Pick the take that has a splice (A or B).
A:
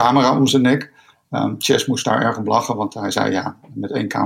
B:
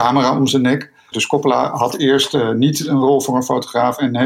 B